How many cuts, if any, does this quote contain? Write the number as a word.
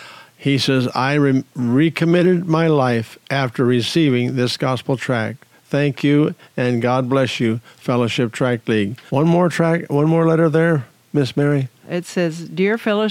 two